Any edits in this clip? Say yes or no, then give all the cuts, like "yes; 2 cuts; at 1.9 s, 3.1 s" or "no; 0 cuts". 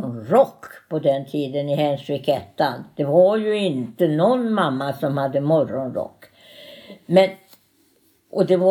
no; 0 cuts